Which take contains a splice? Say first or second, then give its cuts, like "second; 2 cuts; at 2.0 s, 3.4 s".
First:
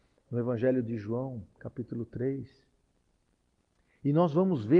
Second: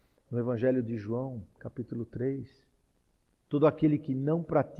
second; 1 cut; at 3.4 s